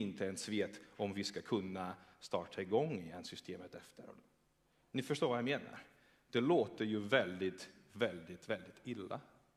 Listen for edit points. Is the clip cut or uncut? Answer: uncut